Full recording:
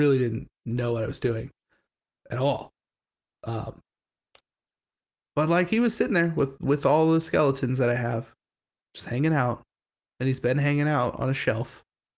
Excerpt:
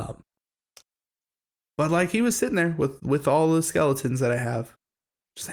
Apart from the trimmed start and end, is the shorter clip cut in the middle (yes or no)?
no